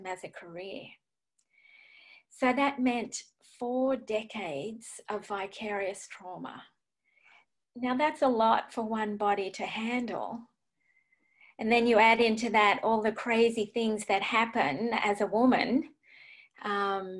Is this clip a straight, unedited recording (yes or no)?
yes